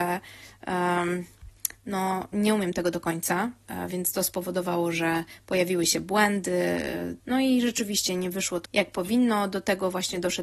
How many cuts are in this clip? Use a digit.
2